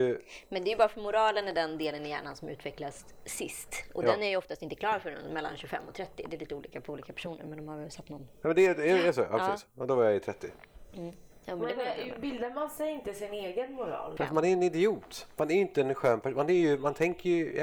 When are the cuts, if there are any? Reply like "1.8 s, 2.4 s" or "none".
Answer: 14.2 s